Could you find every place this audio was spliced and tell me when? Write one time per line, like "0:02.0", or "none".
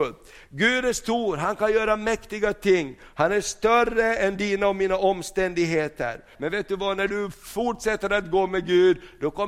0:06.3